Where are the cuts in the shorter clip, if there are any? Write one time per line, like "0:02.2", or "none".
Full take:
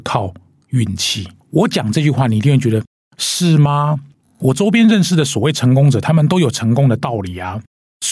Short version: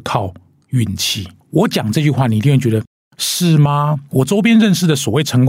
0:04.1

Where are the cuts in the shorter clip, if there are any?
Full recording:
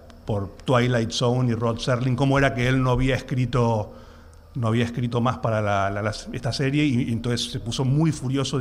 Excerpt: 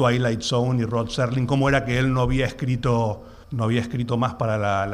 0:03.4

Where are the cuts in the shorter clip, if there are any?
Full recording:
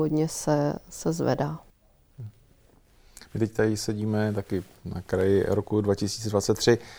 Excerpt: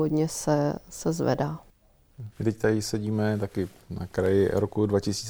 0:02.3

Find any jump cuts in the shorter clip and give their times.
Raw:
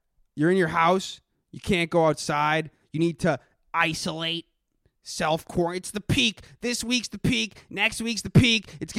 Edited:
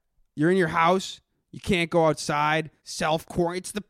0:02.8

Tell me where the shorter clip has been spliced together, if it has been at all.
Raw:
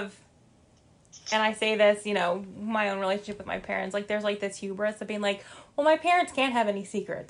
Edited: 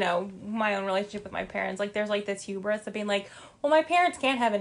none

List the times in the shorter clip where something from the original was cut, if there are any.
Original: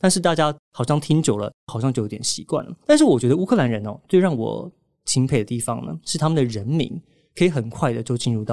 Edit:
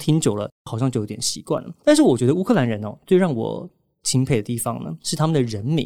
none

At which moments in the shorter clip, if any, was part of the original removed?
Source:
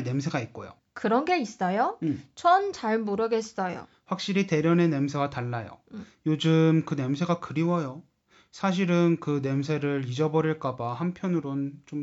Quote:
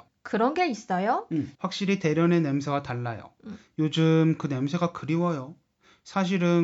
0:01.5

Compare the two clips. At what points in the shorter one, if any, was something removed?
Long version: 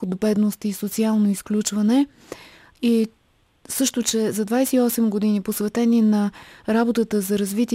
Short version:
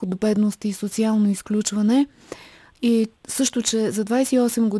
0:03.2

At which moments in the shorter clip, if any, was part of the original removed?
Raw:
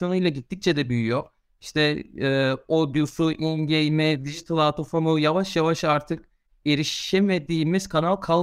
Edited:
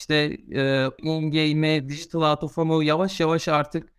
0:01.0

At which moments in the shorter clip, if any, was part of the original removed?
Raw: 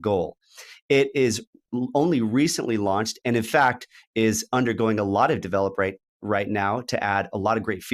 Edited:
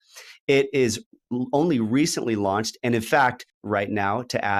0:03.5

